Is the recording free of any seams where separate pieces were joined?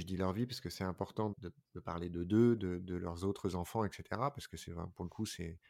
no; 1 cut; at 1.3 s

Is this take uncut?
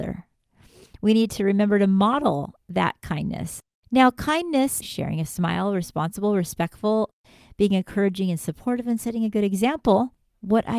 no; 1 cut; at 4.8 s

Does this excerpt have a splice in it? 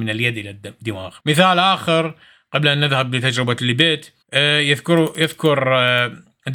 yes; 2 cuts; at 1.2 s, 4.2 s

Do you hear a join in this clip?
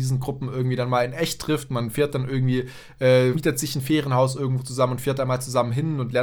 yes; 1 cut; at 3.3 s

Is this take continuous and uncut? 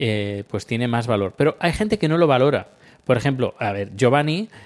yes; 0 cuts

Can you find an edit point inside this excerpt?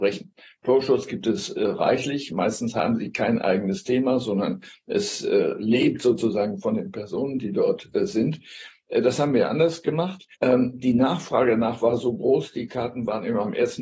yes; 1 cut; at 10.3 s

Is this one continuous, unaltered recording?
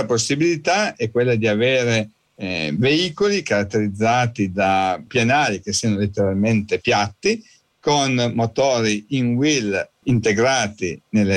no; 2 cuts; at 5.1 s, 10.0 s

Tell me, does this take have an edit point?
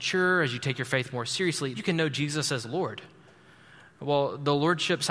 yes; 1 cut; at 1.7 s

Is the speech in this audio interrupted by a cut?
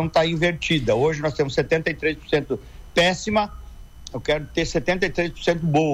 no; 0 cuts

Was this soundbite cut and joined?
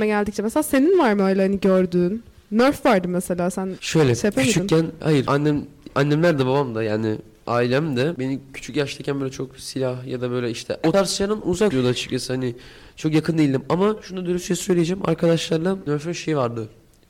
no; 0 cuts

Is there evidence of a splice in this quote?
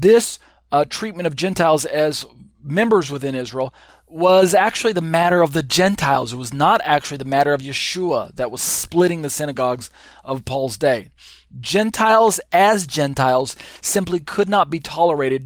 yes; 1 cut; at 3.9 s

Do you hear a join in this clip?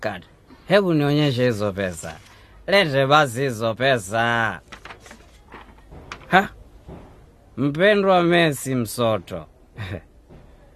no; 0 cuts

